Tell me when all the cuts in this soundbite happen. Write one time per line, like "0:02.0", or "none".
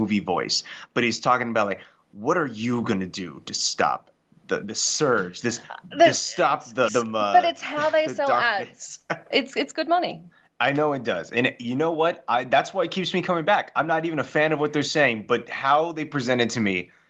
0:06.9
0:09.3